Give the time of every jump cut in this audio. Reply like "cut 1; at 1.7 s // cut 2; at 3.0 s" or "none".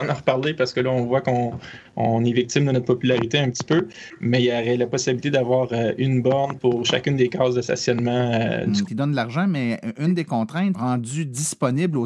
cut 1; at 8.9 s // cut 2; at 10.7 s

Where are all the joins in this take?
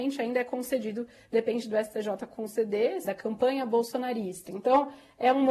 cut 1; at 3.0 s // cut 2; at 4.4 s

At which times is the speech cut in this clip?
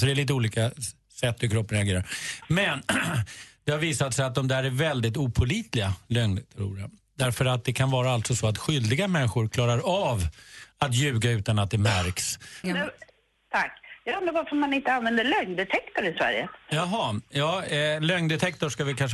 cut 1; at 12.6 s

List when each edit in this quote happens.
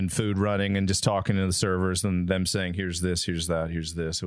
none

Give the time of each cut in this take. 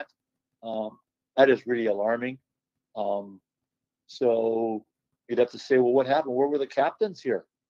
none

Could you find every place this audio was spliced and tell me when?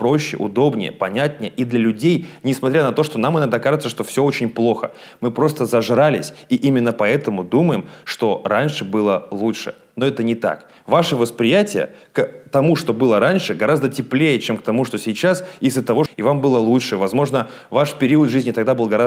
cut 1; at 16.1 s

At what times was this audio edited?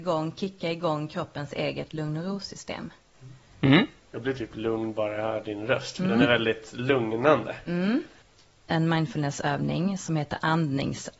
none

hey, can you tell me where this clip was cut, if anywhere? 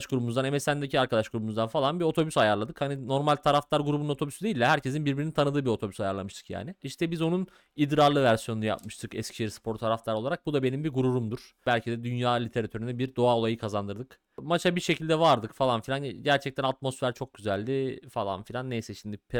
cut 1; at 6.8 s

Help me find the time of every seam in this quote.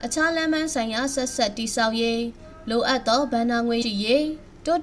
cut 1; at 3.8 s

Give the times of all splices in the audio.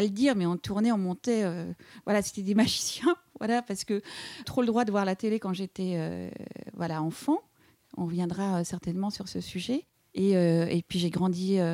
cut 1; at 4.4 s

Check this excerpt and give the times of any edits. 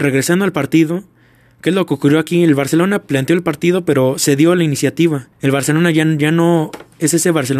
cut 1; at 5.3 s

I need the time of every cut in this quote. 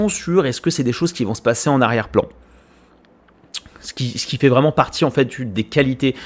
none

